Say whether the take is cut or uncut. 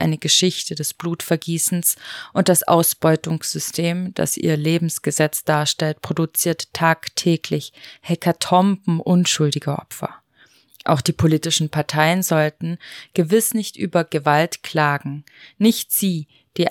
uncut